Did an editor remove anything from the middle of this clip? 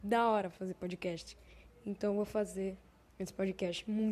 no; 0 cuts

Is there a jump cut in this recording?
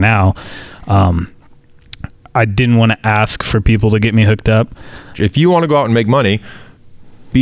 yes; 1 cut; at 5.1 s

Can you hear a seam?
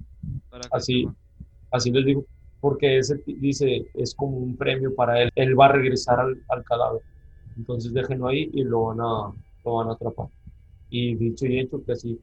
yes; 2 cuts; at 3.9 s, 5.3 s

